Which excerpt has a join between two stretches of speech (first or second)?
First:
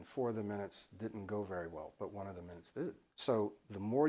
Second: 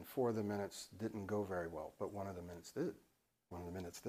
first